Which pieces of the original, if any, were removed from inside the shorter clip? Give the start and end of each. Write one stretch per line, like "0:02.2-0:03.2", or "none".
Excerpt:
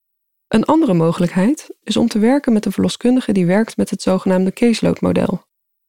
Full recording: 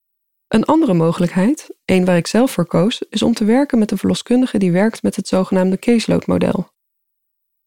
0:01.8-0:03.1